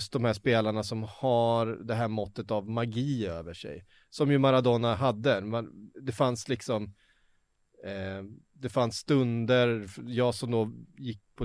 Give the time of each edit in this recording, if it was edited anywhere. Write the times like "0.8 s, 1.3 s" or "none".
none